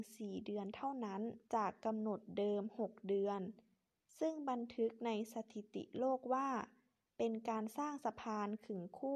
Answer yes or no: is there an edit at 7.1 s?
no